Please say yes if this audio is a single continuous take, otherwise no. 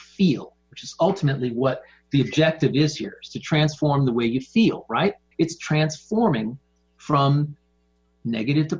no